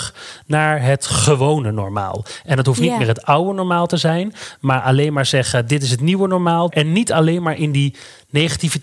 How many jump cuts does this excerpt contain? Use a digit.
1